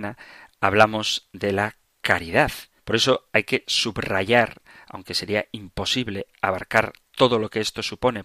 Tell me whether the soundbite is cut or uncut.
cut